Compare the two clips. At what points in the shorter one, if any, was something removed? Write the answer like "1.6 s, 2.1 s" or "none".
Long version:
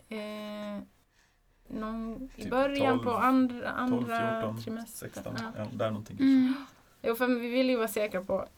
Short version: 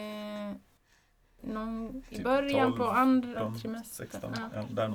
3.4 s